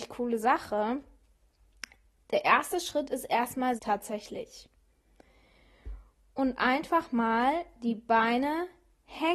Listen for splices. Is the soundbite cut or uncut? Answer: cut